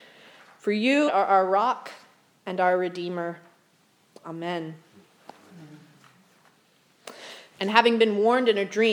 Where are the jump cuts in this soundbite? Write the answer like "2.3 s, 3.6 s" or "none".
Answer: 1.1 s, 7.6 s

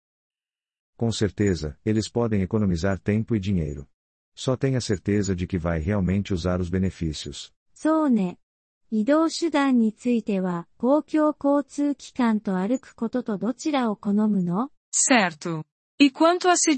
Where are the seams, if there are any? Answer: 1.8 s, 7.6 s, 14.8 s

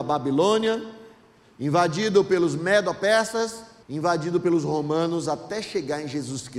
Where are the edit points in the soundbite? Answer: 3.8 s

